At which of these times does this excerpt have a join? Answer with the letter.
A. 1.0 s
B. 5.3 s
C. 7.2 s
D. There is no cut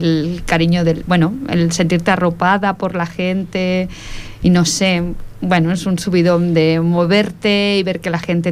D